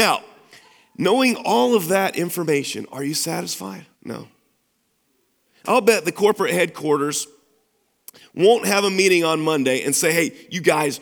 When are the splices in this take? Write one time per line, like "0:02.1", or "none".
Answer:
0:03.9